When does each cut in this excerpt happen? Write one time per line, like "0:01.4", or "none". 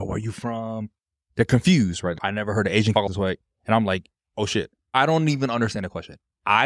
none